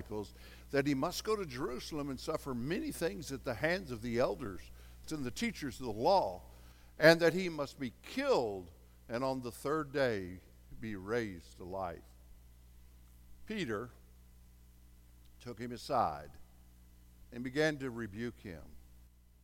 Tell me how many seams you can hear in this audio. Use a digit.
1